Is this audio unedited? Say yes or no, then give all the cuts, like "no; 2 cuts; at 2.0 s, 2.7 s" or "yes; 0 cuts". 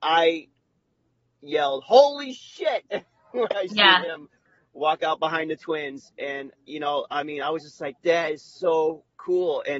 yes; 0 cuts